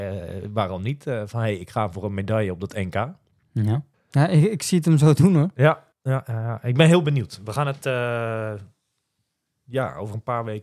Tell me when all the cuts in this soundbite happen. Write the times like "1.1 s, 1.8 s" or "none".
3.9 s, 5.9 s